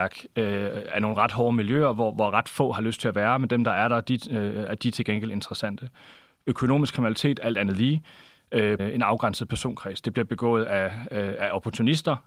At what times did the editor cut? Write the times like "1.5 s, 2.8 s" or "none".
8.8 s